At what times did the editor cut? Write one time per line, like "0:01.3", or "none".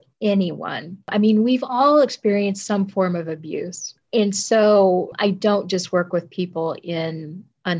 none